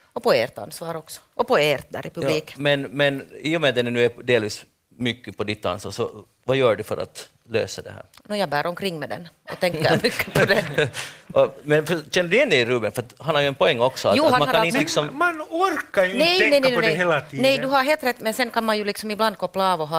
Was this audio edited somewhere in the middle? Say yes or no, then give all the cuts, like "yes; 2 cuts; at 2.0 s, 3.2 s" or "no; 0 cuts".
no; 0 cuts